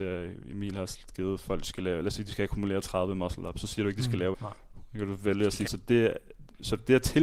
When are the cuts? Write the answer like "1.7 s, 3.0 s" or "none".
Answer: 4.3 s, 5.7 s

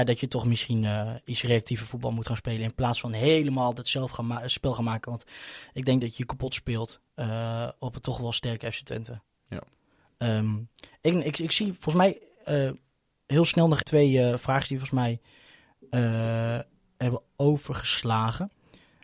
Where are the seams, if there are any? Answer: 13.8 s

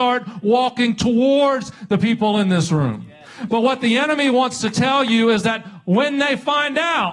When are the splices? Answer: none

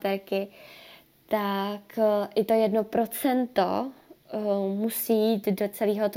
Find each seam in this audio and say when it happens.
none

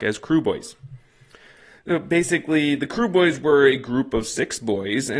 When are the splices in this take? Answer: none

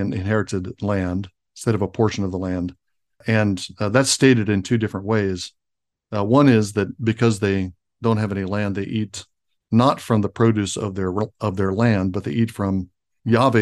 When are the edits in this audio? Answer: none

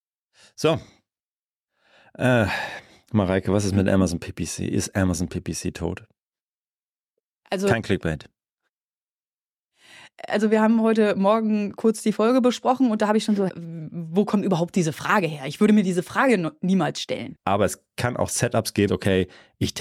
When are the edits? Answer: 13.5 s, 17.3 s, 18.9 s

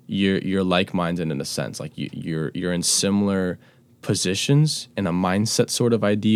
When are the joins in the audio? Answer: none

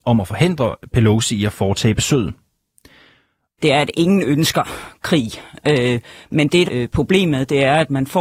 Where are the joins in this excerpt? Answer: 3.6 s, 6.7 s

